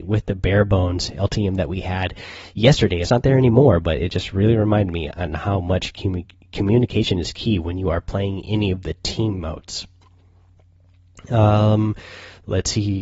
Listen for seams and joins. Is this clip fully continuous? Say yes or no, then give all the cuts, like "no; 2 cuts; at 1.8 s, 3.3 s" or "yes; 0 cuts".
yes; 0 cuts